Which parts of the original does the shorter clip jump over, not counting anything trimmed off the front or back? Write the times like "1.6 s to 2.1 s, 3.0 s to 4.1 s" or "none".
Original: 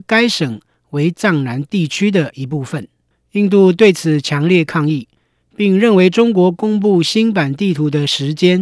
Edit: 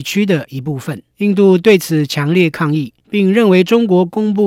3.0 s to 3.2 s, 5.1 s to 5.5 s